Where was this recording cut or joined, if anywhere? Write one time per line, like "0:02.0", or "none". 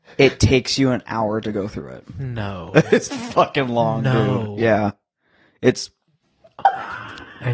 none